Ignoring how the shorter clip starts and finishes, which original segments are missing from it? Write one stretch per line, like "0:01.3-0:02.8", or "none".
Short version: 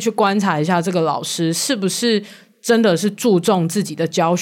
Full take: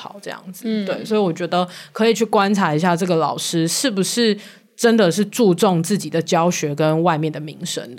none